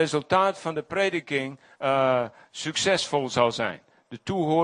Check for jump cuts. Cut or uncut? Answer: uncut